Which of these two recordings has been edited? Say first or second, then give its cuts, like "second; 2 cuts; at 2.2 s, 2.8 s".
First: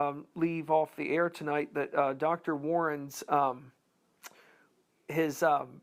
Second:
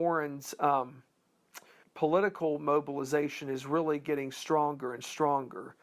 second; 1 cut; at 1.8 s